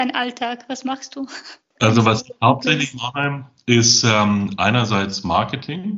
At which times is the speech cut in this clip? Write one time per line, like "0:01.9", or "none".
none